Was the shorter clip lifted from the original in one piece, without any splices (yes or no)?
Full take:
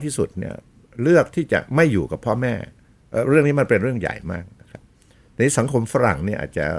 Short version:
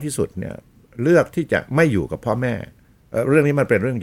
yes